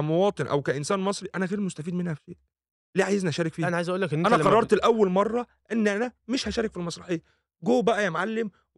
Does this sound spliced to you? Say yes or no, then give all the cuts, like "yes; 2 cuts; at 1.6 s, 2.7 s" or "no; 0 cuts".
no; 0 cuts